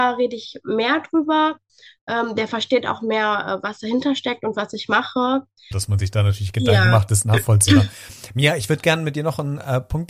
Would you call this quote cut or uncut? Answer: cut